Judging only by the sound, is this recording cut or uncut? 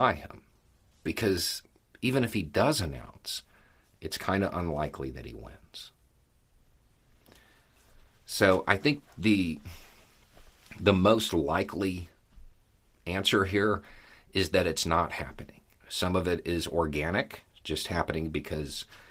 cut